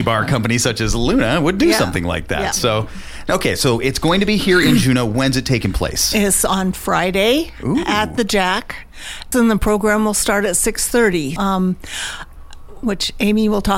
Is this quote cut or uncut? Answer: cut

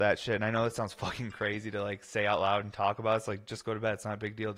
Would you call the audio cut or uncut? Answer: uncut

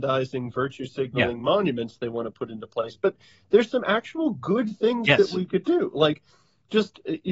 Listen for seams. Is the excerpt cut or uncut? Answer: uncut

